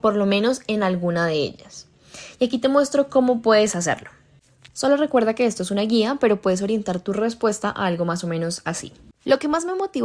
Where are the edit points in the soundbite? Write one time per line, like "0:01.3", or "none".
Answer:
none